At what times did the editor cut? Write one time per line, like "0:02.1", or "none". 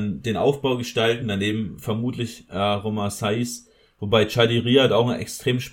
none